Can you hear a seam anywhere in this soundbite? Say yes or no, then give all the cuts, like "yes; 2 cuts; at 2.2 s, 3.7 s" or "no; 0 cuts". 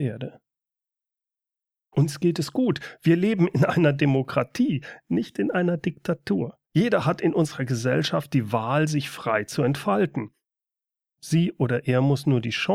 yes; 1 cut; at 6.6 s